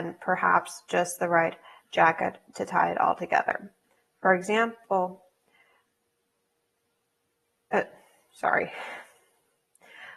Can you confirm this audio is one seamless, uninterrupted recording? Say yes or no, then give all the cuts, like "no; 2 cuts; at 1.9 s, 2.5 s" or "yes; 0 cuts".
yes; 0 cuts